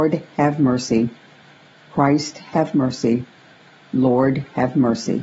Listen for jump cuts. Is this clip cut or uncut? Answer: uncut